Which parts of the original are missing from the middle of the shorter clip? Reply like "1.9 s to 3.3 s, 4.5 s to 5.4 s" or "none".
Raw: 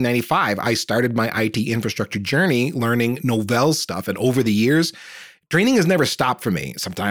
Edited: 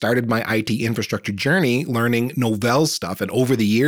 none

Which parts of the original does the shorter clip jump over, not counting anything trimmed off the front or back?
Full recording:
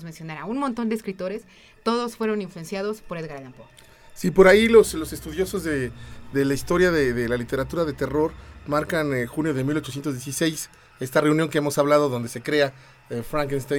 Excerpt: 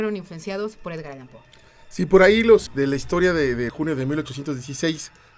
4.9 s to 6.2 s, 7.3 s to 9.3 s

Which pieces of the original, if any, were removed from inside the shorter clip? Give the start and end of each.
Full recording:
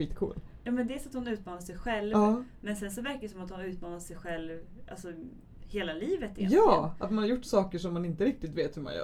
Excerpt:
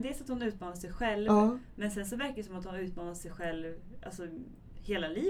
none

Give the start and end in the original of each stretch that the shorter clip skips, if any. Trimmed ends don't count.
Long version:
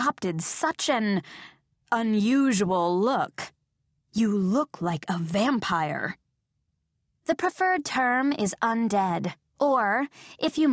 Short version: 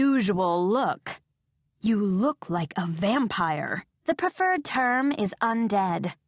6.2 s to 7.1 s

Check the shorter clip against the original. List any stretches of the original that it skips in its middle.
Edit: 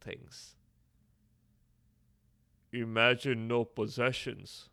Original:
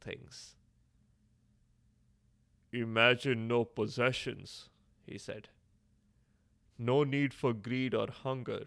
none

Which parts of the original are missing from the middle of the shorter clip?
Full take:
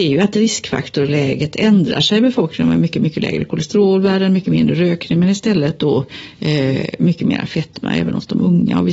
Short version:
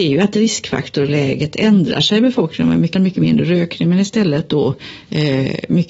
2.9 s to 4.2 s

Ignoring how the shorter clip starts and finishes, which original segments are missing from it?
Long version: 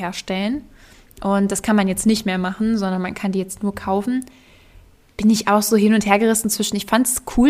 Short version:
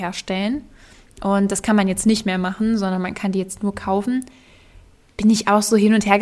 none

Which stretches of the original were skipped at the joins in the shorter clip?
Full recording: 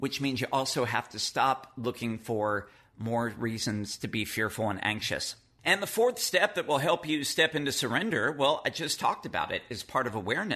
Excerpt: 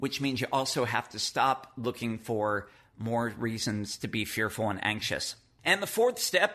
none

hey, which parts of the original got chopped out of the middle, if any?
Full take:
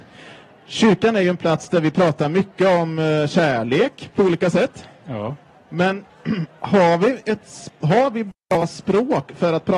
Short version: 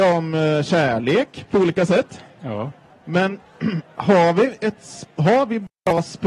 none

